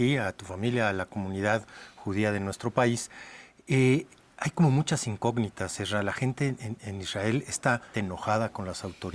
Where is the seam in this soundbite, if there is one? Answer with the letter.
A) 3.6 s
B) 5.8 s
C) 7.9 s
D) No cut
C